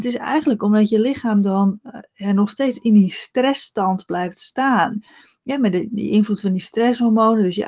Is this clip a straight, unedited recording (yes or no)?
yes